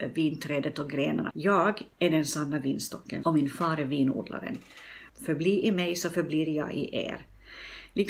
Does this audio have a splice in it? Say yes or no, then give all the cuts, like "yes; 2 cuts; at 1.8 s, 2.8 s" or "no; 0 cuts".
yes; 3 cuts; at 1.3 s, 3.2 s, 5.1 s